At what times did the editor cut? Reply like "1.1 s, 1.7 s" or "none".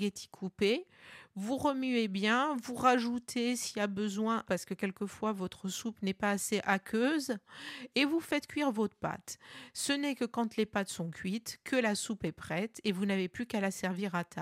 4.4 s